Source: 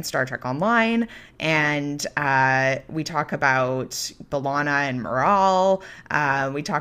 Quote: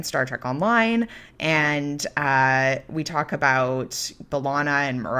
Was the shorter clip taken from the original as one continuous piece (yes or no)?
yes